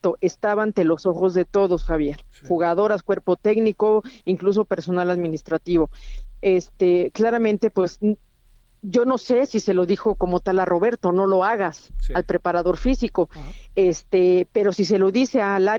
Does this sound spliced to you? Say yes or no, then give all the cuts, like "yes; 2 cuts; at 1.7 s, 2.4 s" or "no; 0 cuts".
no; 0 cuts